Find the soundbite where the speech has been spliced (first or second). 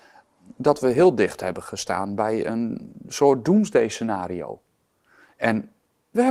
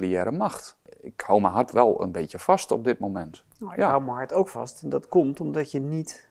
second